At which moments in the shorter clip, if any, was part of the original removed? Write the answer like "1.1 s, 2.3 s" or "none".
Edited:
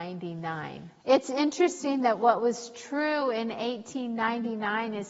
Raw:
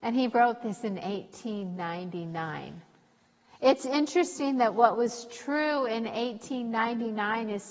1.0 s